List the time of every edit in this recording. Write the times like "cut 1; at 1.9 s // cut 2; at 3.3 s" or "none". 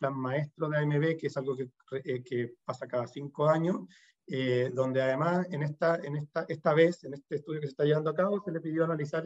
none